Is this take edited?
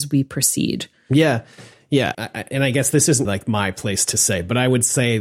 yes; 2 cuts; at 2.1 s, 3.3 s

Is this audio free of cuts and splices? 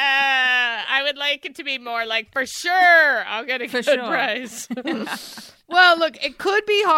yes; 0 cuts

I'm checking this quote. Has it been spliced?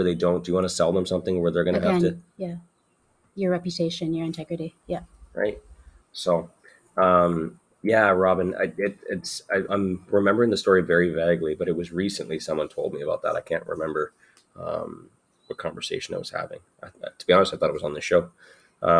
yes; 1 cut; at 9.7 s

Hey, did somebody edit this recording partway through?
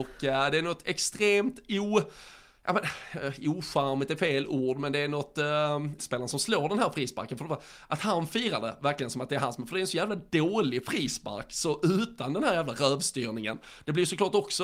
yes; 1 cut; at 6.0 s

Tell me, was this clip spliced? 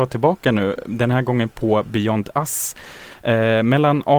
no; 0 cuts

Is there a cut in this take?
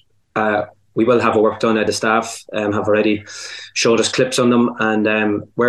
no; 0 cuts

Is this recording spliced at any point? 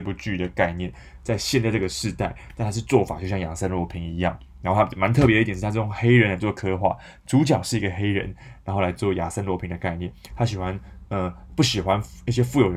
yes; 1 cut; at 10.3 s

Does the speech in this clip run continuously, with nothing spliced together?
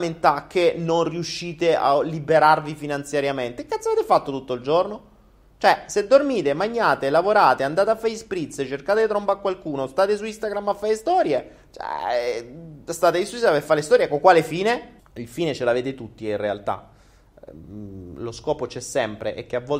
no; 1 cut; at 15.0 s

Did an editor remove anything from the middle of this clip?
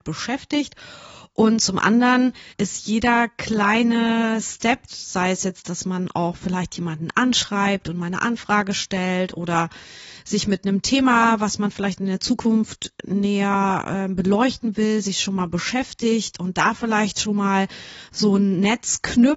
yes; 2 cuts; at 2.5 s, 4.9 s

